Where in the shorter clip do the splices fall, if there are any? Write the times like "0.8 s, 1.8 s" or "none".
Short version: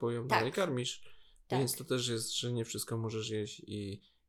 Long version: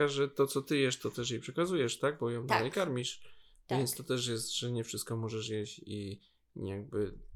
none